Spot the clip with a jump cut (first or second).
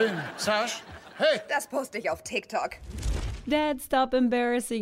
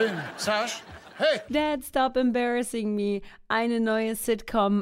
second